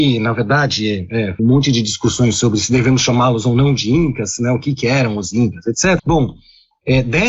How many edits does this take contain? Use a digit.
2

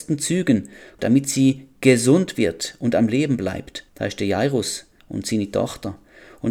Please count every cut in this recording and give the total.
2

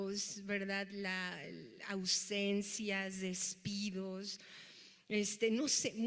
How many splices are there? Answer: 0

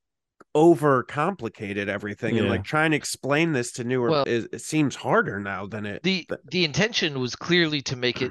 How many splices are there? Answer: 1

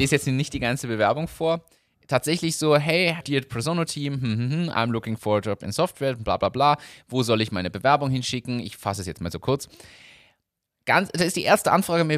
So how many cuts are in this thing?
1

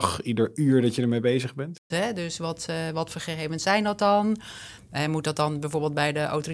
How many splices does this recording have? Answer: 1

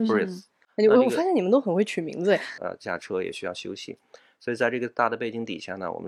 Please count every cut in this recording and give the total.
1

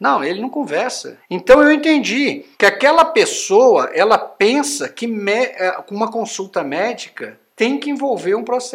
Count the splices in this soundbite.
2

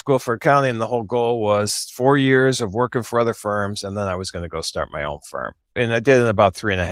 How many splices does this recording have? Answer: 1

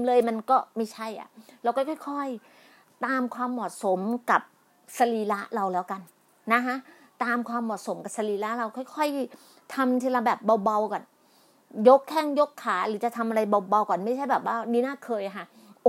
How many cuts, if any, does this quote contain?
0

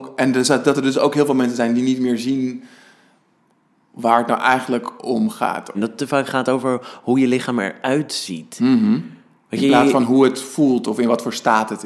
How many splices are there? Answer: 1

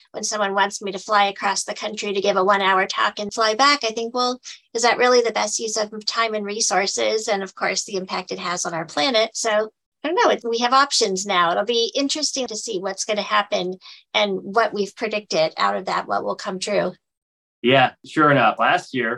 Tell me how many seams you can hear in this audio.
2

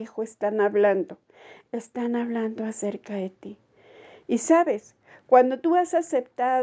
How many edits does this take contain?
0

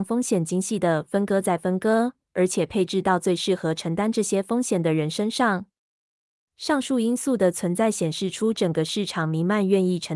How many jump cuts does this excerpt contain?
1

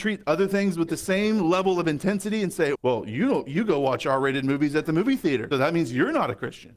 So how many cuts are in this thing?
2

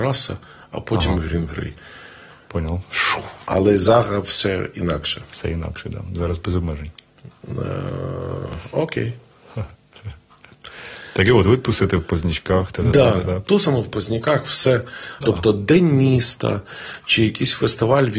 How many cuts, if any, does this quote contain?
1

